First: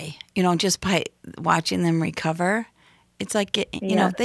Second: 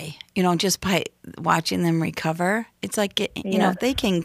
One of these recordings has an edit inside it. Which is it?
second; 1 cut; at 2.7 s

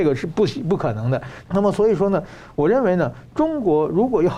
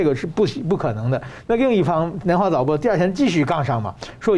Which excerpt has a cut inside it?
first; 1 cut; at 1.5 s

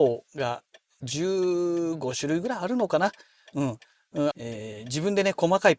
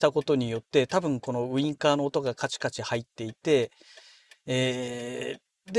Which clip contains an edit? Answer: first; 1 cut; at 4.3 s

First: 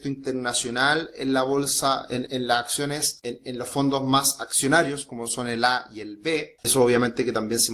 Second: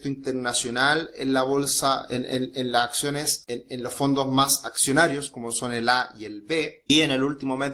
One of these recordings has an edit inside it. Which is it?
first; 2 cuts; at 2.3 s, 6.6 s

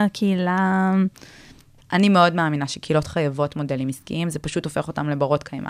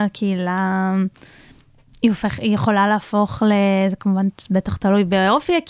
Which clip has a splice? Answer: first; 1 cut; at 1.8 s

